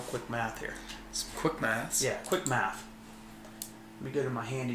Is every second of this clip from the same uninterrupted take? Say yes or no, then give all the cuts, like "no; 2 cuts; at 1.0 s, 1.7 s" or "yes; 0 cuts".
yes; 0 cuts